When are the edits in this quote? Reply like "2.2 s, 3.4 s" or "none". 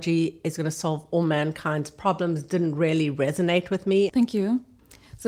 4.1 s